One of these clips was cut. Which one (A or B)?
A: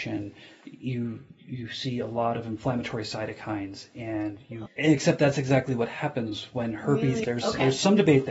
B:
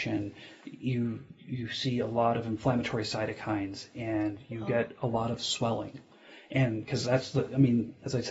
A